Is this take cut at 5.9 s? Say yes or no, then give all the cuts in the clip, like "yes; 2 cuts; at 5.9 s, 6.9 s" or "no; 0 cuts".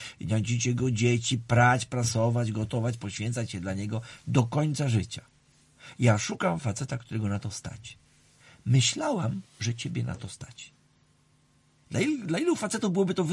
no; 0 cuts